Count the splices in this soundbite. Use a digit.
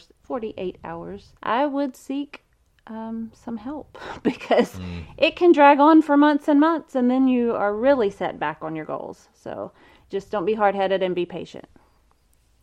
2